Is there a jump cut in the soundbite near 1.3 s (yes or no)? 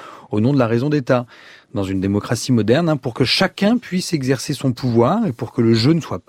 no